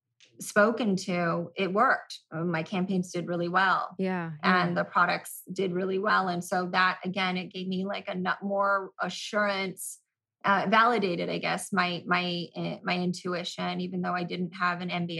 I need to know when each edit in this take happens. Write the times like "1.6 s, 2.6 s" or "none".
none